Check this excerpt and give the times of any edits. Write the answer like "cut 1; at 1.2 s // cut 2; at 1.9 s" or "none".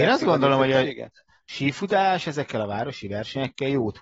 none

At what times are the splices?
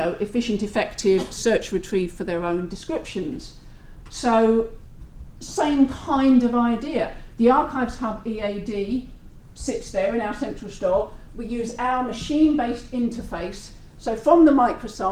none

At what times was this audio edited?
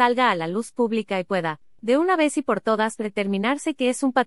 none

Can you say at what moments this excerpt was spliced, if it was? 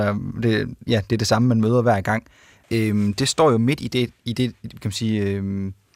cut 1; at 2.6 s

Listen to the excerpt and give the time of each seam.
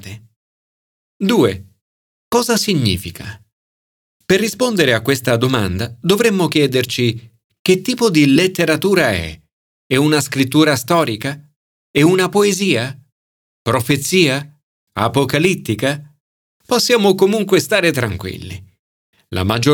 cut 1; at 16.5 s

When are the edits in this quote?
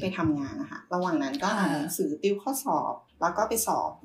cut 1; at 3.1 s

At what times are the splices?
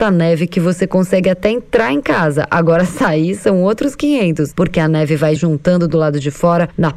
cut 1; at 5.4 s

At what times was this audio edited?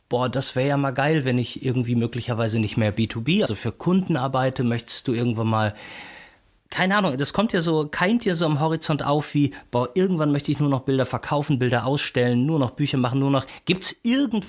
cut 1; at 3.5 s

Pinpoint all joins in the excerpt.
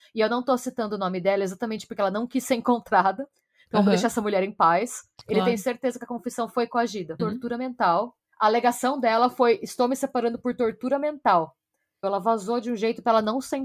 cut 1; at 7.2 s // cut 2; at 12.0 s

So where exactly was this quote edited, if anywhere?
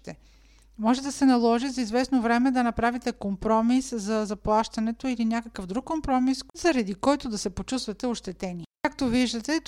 cut 1; at 8.7 s

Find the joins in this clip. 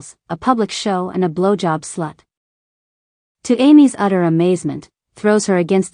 cut 1; at 5.0 s

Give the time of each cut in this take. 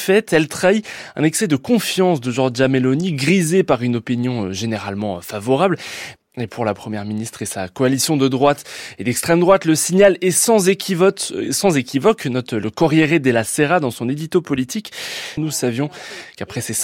cut 1; at 6.2 s // cut 2; at 15.4 s

